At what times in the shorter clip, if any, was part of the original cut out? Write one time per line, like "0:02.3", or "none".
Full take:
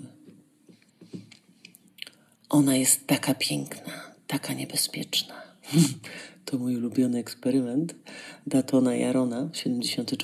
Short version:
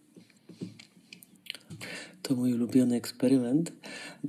0:01.7

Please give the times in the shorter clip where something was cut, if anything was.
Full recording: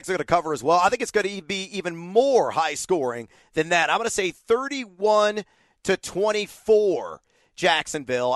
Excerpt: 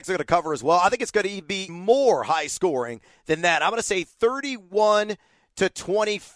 0:01.7

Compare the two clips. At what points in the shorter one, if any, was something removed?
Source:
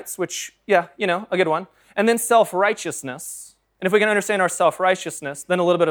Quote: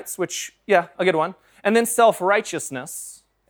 0:00.9

